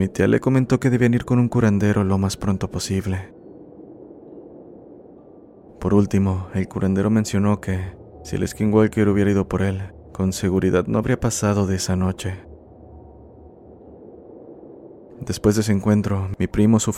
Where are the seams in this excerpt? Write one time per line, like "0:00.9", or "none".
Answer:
0:05.6

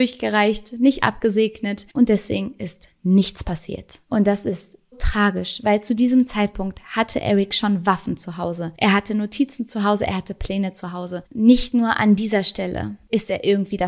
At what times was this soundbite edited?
0:04.9
0:11.2

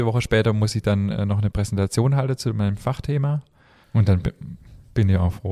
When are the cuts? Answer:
0:03.8

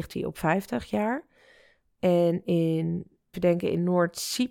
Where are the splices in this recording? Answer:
0:03.3

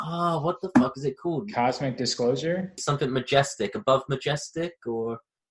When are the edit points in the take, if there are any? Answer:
0:02.8

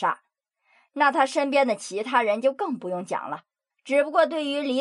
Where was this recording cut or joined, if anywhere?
0:03.7

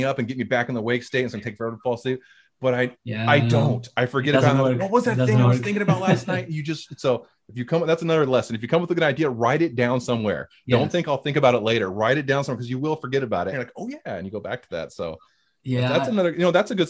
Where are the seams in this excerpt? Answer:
0:02.9
0:13.5

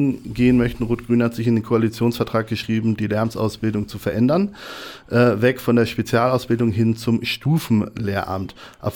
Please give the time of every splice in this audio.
none

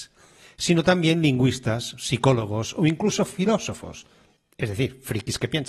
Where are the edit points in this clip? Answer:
none

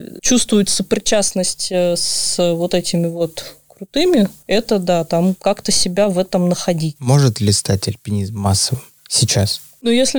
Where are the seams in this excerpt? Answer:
none

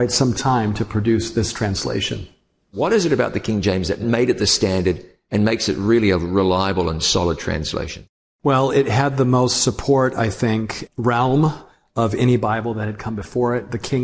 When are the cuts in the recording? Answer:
0:10.9

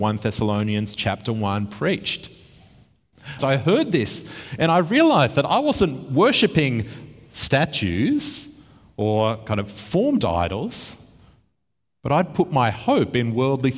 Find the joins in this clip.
0:03.4

